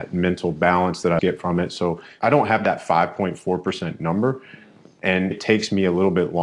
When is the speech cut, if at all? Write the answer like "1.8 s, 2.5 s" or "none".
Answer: 1.2 s, 5.3 s